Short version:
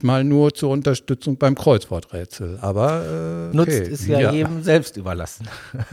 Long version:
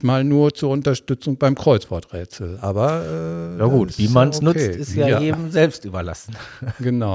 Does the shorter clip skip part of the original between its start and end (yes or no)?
yes